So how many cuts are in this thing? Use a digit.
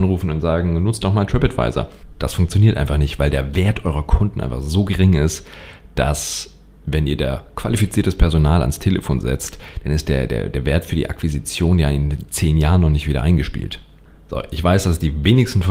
0